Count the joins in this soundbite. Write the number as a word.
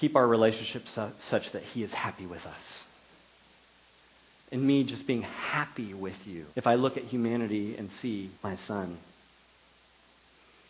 three